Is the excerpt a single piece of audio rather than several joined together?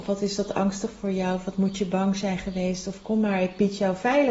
yes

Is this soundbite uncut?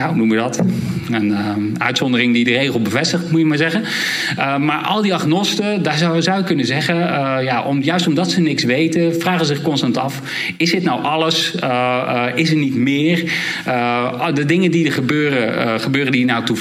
yes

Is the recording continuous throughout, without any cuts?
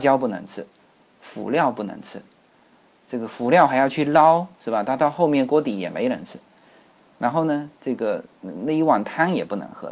yes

